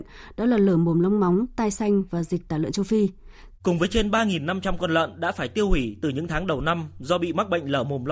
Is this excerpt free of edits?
no; 1 cut; at 3.6 s

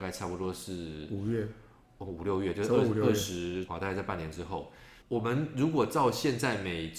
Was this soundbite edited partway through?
yes; 2 cuts; at 3.7 s, 5.0 s

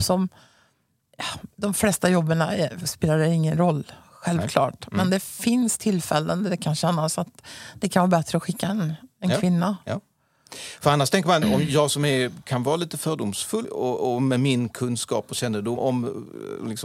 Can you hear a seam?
yes; 2 cuts; at 11.4 s, 15.8 s

